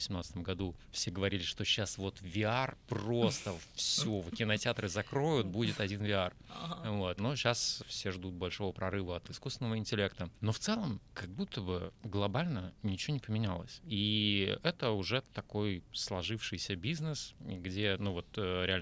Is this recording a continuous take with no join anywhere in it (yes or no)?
yes